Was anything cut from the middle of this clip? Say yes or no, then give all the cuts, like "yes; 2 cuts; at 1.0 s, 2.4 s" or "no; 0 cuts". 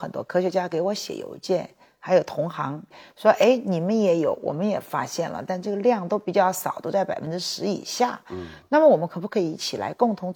no; 0 cuts